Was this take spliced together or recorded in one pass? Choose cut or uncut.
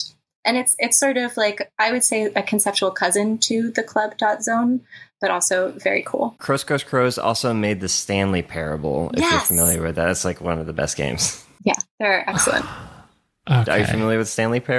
uncut